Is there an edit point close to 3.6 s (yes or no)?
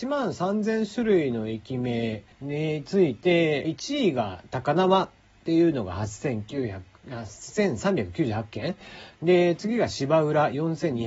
yes